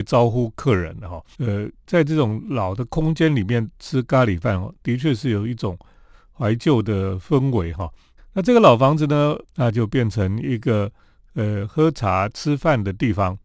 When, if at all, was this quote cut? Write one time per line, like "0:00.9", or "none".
0:01.3
0:08.2
0:09.4